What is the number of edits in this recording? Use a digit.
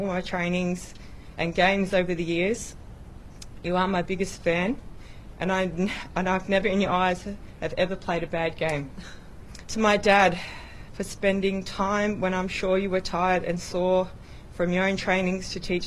2